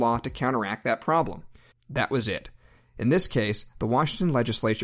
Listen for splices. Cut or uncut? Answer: cut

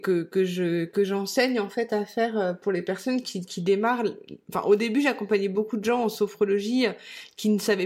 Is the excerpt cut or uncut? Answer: uncut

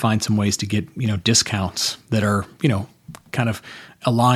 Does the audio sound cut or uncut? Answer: uncut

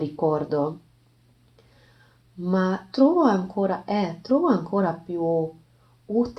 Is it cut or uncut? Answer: uncut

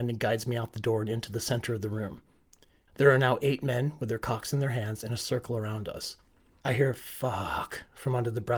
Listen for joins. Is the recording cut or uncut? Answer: cut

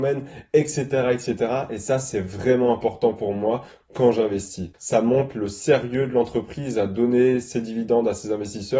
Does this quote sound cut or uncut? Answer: cut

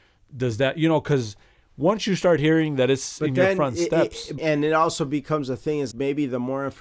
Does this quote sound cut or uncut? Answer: cut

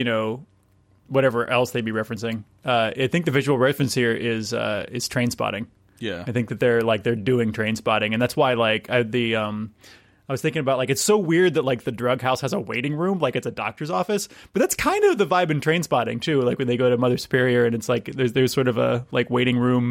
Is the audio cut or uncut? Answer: uncut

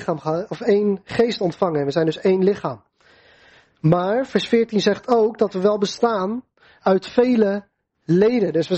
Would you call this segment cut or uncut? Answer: uncut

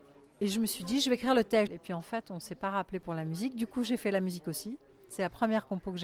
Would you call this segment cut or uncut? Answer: cut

